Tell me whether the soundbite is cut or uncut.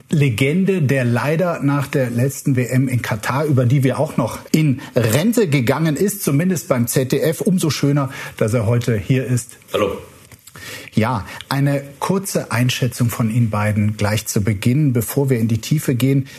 cut